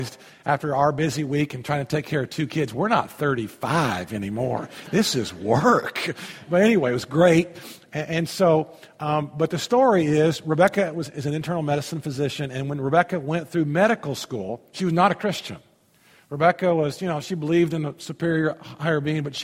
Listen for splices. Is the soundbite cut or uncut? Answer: uncut